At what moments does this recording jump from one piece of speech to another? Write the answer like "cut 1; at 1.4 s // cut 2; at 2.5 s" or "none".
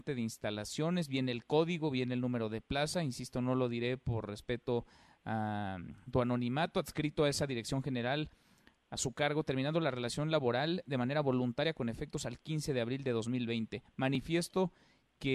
none